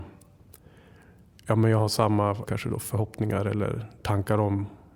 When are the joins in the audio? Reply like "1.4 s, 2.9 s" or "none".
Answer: 2.5 s